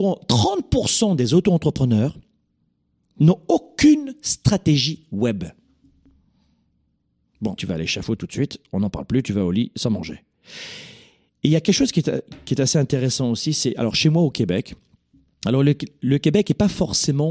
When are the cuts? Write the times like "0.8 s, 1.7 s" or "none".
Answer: 7.6 s